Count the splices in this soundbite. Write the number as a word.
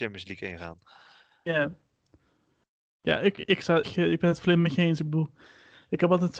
one